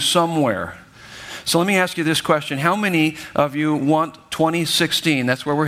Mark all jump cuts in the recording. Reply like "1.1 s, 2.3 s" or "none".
none